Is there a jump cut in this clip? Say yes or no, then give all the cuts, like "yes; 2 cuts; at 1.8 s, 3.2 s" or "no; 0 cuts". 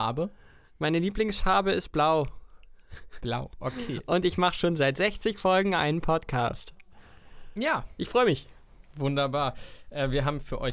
no; 0 cuts